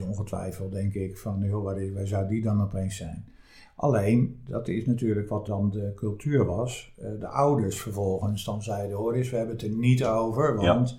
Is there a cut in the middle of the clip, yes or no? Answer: yes